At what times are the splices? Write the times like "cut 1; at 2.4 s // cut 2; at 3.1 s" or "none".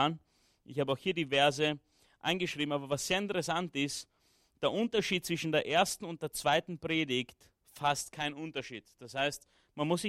none